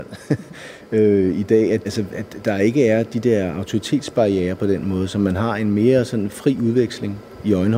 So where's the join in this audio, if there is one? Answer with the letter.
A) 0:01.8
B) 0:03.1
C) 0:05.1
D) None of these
A